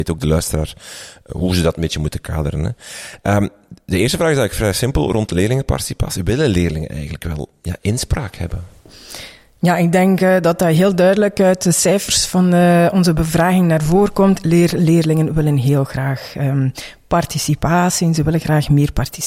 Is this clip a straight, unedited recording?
yes; 0 cuts

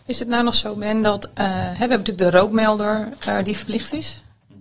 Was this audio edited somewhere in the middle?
no; 0 cuts

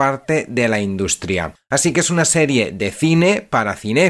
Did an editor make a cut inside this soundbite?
no; 0 cuts

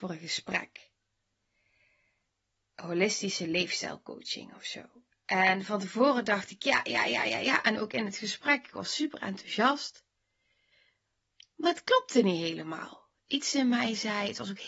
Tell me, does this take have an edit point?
no; 0 cuts

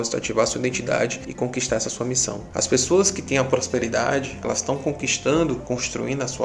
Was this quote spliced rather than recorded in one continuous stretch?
yes; 2 cuts; at 2.5 s, 4.4 s

